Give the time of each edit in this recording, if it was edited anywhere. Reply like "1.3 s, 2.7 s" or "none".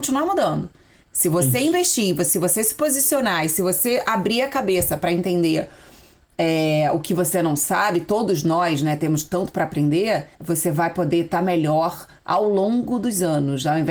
10.3 s